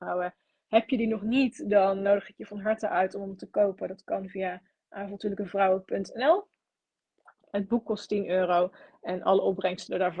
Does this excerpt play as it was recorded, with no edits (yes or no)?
yes